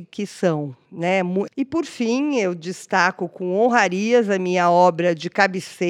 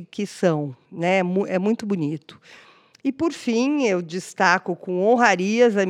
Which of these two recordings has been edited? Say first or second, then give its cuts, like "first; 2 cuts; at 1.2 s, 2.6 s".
first; 1 cut; at 1.5 s